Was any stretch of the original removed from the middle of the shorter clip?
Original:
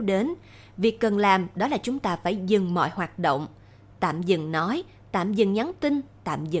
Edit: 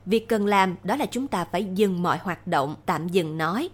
yes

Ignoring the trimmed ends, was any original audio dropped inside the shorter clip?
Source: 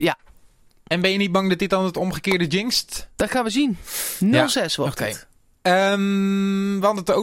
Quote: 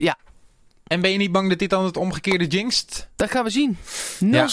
no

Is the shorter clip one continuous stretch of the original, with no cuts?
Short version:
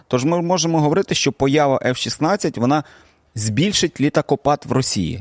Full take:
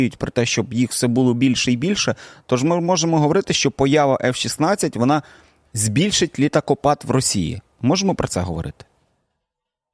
yes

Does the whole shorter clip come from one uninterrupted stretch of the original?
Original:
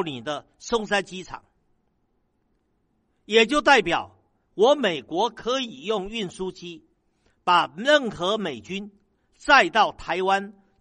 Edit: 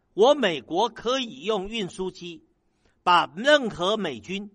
yes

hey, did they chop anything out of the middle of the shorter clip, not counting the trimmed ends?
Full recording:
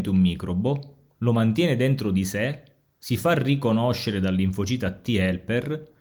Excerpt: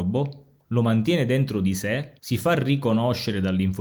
yes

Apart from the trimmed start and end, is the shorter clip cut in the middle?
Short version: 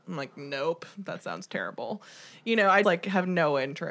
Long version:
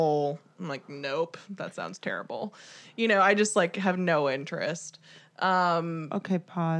yes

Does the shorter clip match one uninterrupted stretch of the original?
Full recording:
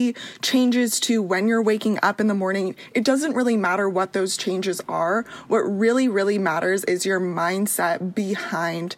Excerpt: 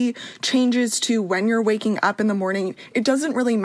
yes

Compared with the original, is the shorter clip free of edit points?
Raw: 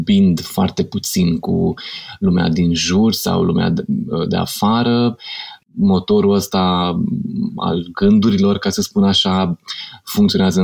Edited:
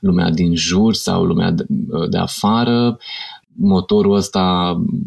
yes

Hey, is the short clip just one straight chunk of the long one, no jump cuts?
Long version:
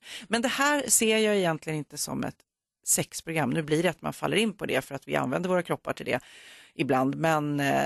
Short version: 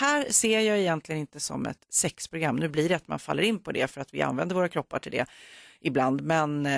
no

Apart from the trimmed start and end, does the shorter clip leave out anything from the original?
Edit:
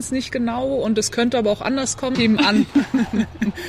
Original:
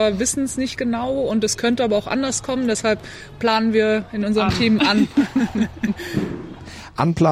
yes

